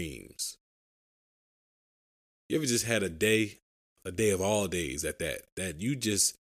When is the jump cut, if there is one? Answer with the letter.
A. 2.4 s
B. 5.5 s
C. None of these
C